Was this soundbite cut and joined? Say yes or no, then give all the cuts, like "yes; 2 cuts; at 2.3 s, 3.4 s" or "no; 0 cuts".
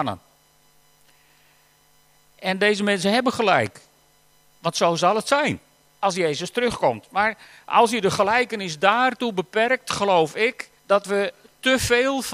yes; 1 cut; at 10.8 s